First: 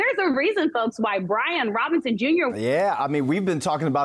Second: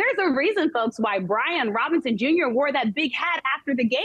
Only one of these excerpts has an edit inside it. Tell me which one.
first; 1 cut; at 2.5 s

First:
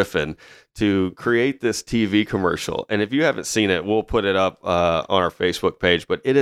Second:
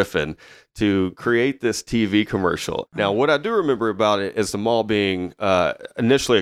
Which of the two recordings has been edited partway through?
second; 1 cut; at 2.9 s

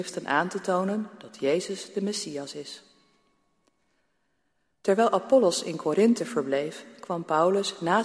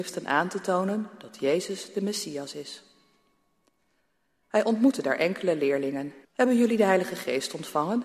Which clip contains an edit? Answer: second; 2 cuts; at 4.4 s, 6.2 s

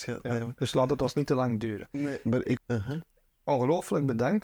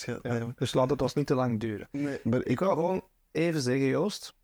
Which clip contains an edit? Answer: first; 1 cut; at 2.6 s

